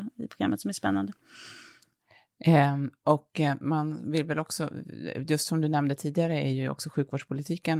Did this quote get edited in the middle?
no; 0 cuts

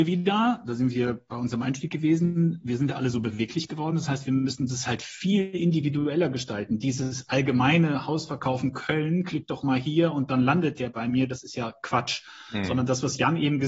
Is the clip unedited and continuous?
yes; 0 cuts

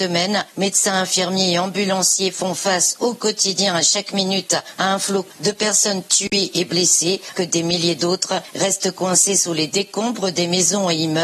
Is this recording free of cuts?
no; 1 cut; at 7.3 s

